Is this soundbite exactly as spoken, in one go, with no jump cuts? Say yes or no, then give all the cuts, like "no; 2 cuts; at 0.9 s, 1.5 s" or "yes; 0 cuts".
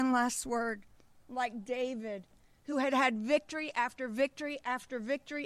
yes; 0 cuts